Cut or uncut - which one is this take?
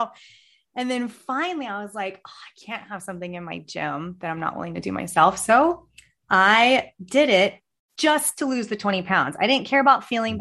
uncut